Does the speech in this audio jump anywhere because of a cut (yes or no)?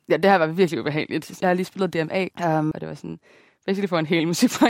yes